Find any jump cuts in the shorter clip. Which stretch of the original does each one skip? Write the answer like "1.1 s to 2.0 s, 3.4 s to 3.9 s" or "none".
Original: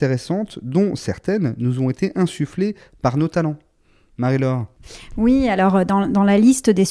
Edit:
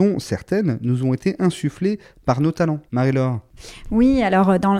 3.6 s to 4.1 s